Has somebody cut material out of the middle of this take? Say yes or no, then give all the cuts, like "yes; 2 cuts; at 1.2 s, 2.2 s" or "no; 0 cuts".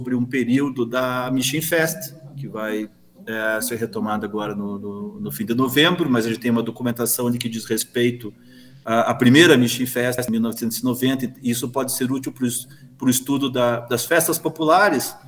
no; 0 cuts